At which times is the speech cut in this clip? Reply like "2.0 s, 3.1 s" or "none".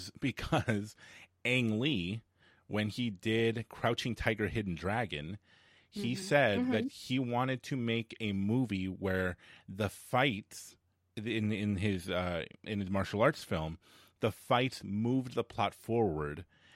none